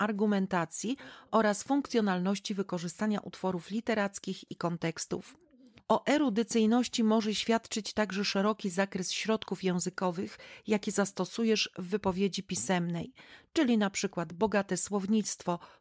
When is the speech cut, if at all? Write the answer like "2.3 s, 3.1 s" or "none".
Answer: none